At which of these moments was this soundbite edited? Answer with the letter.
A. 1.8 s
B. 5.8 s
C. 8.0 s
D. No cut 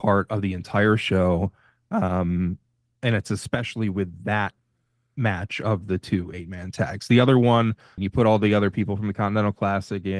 C